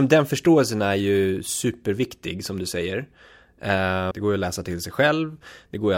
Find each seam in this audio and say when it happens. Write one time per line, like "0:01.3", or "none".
0:04.1